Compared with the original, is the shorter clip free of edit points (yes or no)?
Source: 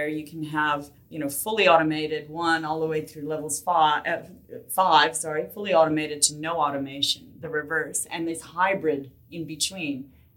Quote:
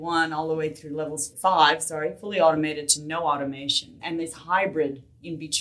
no